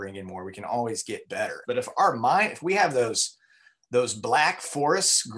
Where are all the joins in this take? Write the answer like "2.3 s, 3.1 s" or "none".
1.6 s